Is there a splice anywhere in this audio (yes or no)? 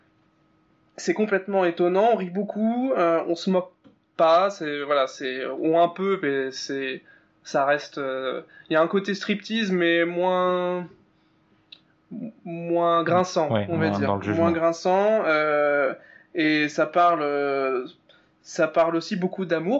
no